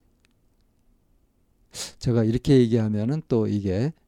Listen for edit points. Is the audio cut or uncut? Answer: uncut